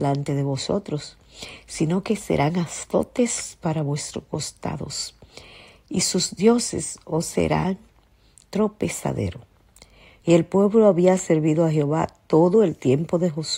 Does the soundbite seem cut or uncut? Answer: cut